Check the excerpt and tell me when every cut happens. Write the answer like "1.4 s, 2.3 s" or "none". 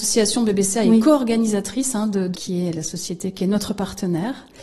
2.3 s